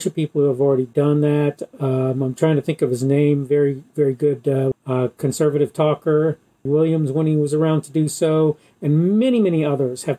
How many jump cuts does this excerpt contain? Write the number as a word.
two